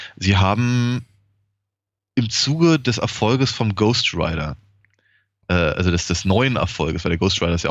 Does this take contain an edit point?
no; 0 cuts

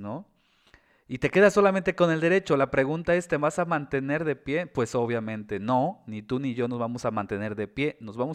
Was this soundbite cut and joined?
no; 0 cuts

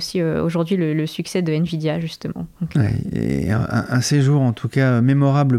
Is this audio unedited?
yes; 0 cuts

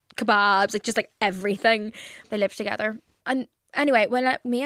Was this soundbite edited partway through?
yes; 1 cut; at 2.2 s

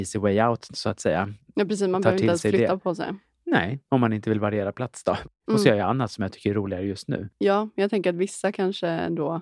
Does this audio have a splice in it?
yes; 1 cut; at 5.5 s

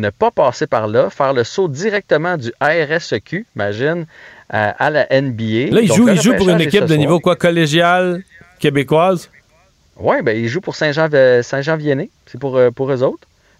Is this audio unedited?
yes; 0 cuts

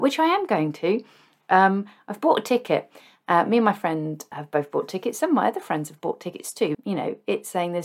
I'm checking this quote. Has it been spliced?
yes; 2 cuts; at 4.3 s, 6.7 s

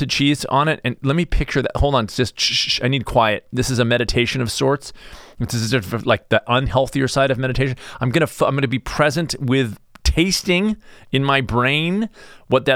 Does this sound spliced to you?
no; 0 cuts

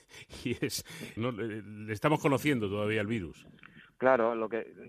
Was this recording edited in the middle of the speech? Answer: yes; 1 cut; at 1.2 s

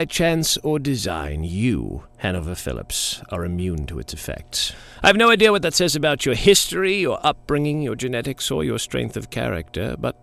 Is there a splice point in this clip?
no; 0 cuts

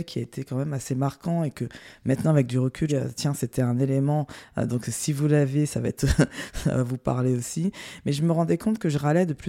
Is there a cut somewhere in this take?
yes; 1 cut; at 2.9 s

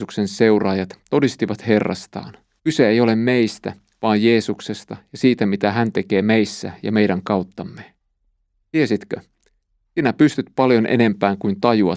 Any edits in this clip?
yes; 2 cuts; at 2.6 s, 8.6 s

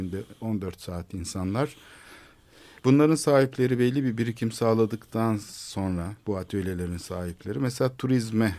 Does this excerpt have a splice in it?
no; 0 cuts

